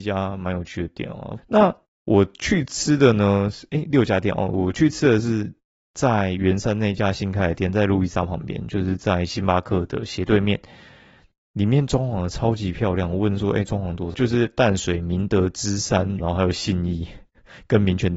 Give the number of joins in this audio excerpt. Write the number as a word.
three